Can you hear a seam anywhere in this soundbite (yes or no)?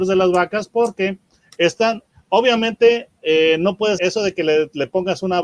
yes